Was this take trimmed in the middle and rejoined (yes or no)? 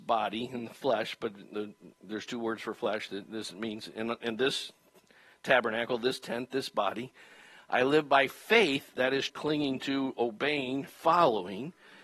yes